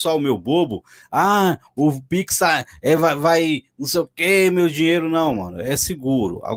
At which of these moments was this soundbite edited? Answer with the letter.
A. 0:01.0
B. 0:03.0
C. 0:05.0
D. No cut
D